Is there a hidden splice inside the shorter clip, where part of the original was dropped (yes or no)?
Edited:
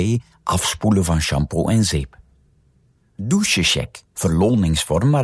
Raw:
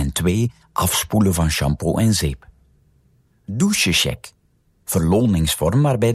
yes